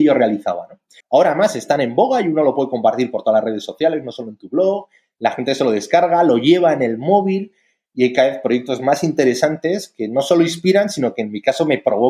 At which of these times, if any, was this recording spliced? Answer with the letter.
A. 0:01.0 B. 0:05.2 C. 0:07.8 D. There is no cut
A